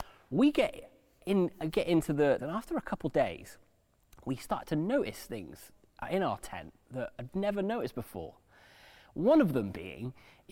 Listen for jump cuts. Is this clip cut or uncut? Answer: cut